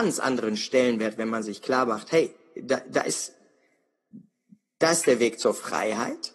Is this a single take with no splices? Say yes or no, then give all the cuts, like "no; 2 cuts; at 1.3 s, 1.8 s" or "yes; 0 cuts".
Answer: yes; 0 cuts